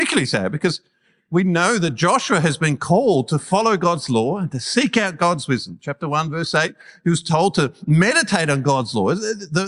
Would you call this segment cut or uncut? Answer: uncut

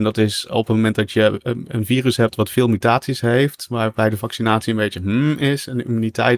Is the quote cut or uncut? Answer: uncut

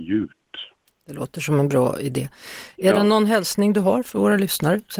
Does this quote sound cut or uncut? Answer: uncut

